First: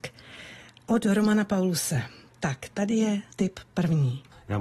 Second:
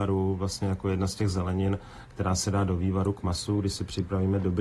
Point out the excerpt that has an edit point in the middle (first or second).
first